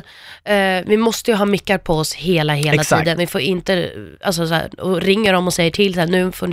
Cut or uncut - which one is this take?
uncut